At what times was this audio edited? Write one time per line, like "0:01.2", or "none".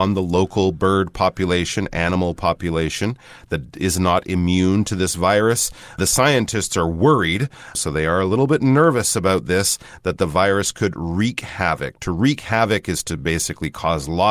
none